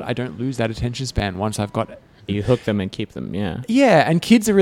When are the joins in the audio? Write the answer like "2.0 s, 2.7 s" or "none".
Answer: 2.3 s